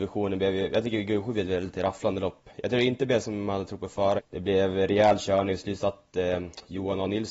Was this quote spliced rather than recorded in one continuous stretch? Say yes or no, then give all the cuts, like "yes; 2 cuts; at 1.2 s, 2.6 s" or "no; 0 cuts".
yes; 1 cut; at 4.2 s